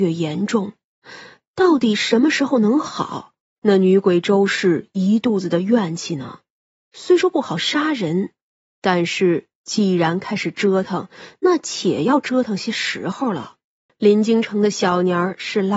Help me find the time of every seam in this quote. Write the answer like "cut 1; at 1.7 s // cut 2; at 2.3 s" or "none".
cut 1; at 3.4 s // cut 2; at 13.9 s